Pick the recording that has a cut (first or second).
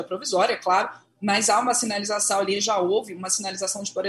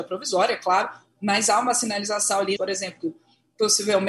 second